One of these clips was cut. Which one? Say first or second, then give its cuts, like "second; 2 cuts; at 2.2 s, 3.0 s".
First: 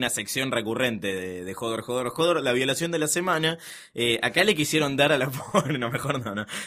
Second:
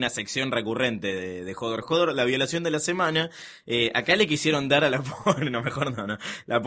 second; 1 cut; at 1.8 s